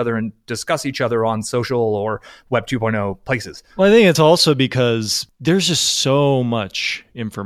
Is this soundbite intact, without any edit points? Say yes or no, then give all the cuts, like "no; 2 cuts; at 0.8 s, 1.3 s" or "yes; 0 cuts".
yes; 0 cuts